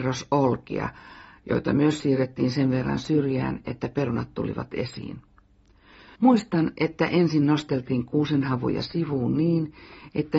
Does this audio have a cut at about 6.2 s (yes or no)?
yes